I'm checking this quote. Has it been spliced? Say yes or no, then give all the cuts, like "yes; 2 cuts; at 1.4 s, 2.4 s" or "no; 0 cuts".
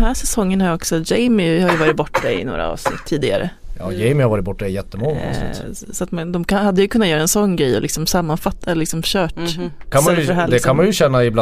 yes; 1 cut; at 9.9 s